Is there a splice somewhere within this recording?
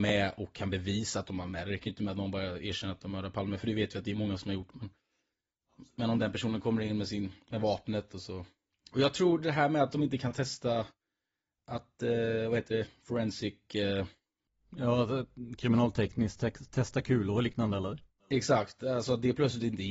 no; 0 cuts

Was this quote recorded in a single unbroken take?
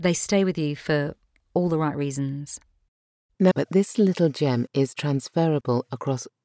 no; 1 cut; at 3.5 s

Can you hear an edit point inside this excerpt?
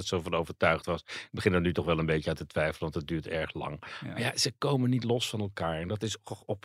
no; 0 cuts

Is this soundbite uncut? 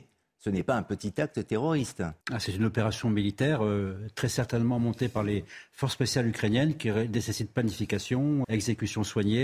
no; 2 cuts; at 2.2 s, 8.4 s

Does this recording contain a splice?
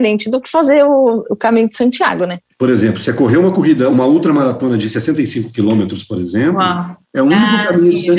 yes; 1 cut; at 7.0 s

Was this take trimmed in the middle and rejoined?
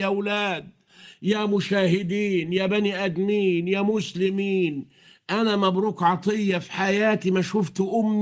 no; 0 cuts

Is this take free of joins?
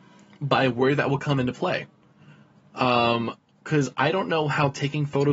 yes; 0 cuts

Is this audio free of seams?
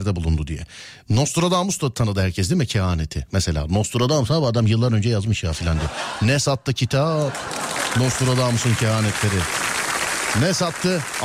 yes; 0 cuts

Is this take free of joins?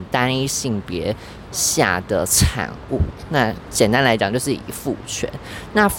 yes; 0 cuts

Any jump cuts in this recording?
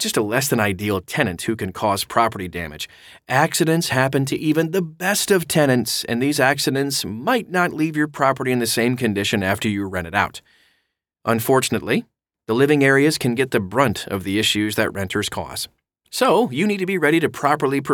no; 0 cuts

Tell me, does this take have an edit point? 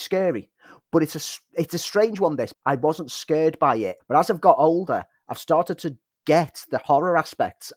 yes; 2 cuts; at 2.5 s, 4.0 s

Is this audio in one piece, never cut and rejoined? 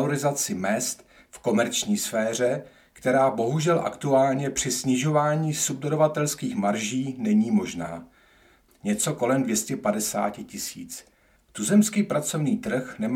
no; 2 cuts; at 8.7 s, 11.4 s

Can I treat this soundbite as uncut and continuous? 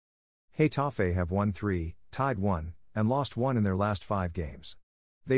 yes; 0 cuts

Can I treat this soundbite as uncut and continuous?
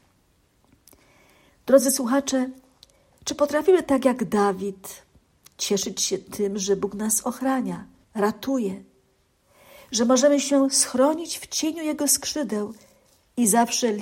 no; 1 cut; at 8.0 s

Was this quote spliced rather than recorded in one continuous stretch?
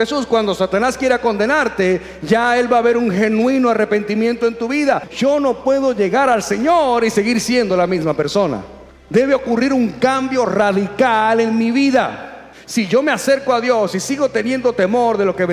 no; 0 cuts

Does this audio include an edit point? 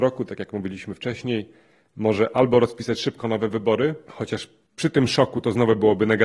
no; 0 cuts

